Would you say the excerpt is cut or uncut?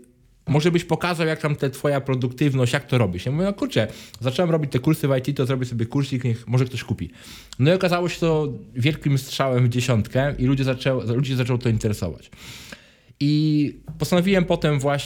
uncut